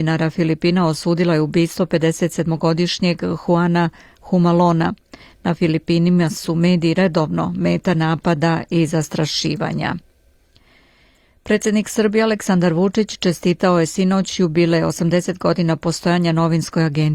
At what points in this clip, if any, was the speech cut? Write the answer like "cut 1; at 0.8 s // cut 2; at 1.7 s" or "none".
none